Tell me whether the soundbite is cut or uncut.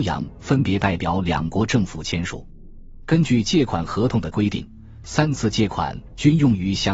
uncut